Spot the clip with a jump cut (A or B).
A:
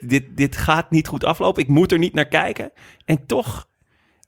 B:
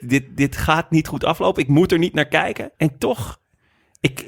B